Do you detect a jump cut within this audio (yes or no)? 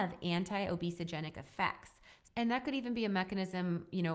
yes